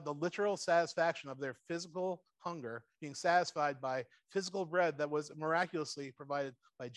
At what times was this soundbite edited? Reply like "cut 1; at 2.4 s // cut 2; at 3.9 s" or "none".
none